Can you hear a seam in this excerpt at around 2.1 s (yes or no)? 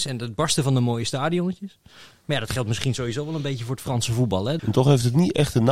yes